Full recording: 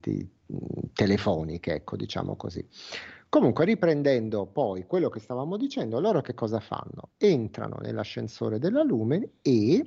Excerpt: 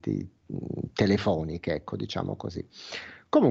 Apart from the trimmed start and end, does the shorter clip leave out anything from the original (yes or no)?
no